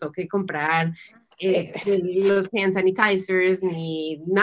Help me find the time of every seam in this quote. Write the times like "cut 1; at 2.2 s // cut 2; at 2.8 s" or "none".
none